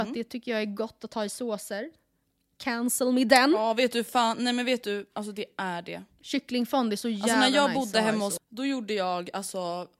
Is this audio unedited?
no; 1 cut; at 8.4 s

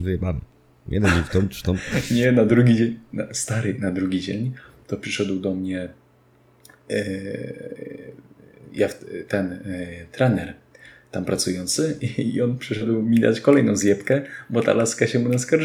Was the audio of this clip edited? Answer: no; 0 cuts

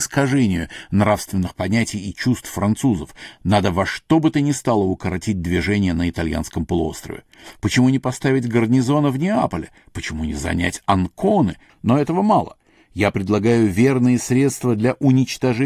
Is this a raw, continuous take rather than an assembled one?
no; 2 cuts; at 7.6 s, 11.7 s

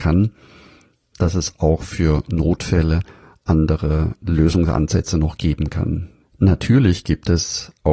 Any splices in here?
yes; 2 cuts; at 1.1 s, 6.2 s

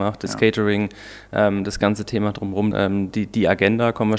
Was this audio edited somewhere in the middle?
yes; 1 cut; at 2.7 s

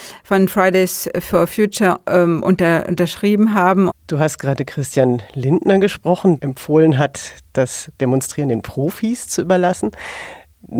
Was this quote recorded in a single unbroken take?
no; 2 cuts; at 3.9 s, 6.4 s

